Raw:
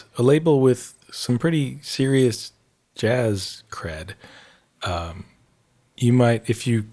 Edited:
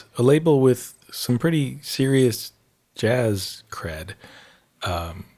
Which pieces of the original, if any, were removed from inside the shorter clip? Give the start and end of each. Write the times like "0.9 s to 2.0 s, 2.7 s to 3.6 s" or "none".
none

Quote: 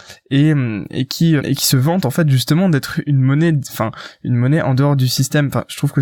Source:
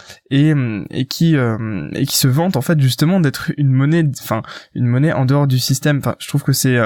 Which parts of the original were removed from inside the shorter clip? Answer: 1.4 s to 1.9 s

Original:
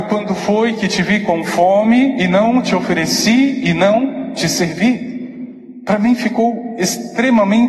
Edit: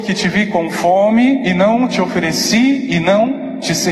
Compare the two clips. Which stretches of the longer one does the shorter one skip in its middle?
none

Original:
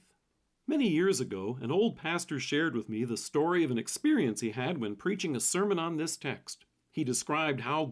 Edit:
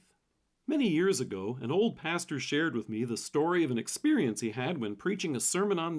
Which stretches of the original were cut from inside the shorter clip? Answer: none

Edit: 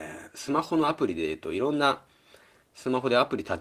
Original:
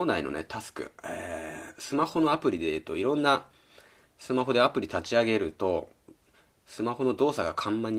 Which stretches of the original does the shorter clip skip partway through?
none

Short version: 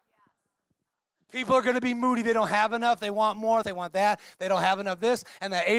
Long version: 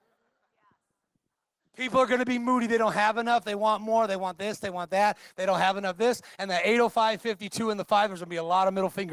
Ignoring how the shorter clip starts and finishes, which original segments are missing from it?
4.1 s to 4.6 s

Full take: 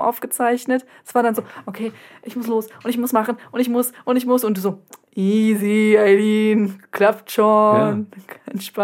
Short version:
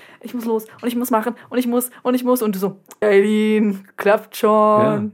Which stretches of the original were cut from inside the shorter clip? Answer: 5.0 s to 6.0 s

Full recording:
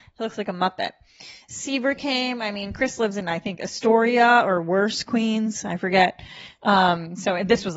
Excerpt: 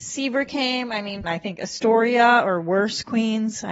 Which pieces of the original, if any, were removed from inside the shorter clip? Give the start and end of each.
2.7 s to 3.2 s

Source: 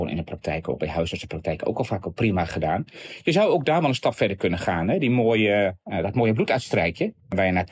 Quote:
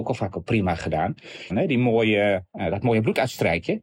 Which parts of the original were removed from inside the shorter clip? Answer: 3.2 s to 4.8 s

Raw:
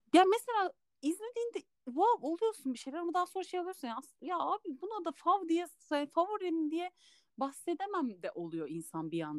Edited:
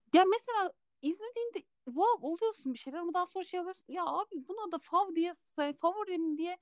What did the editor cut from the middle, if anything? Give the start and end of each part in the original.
3.8 s to 4.1 s

